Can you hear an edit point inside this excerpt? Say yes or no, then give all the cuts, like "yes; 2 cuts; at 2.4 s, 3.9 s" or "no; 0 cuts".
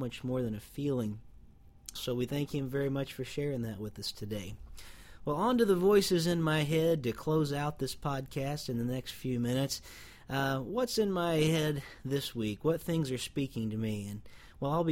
yes; 1 cut; at 2.0 s